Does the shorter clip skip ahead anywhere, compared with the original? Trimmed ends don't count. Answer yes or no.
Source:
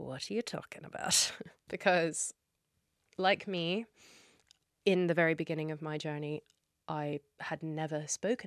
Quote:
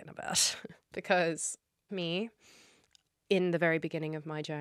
yes